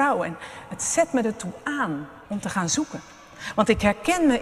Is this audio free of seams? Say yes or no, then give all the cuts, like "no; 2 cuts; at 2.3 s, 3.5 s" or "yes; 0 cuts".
no; 1 cut; at 2.2 s